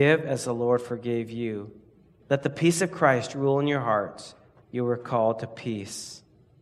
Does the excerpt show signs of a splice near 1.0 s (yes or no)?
no